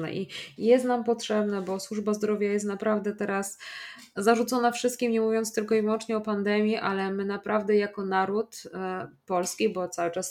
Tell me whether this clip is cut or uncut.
uncut